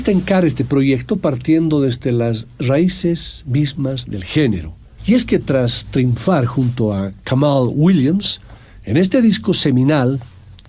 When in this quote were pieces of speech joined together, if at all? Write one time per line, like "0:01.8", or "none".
0:05.0